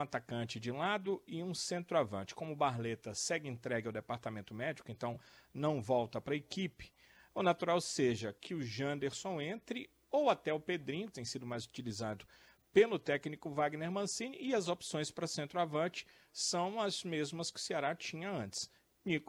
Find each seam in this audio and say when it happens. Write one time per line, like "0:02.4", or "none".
0:11.1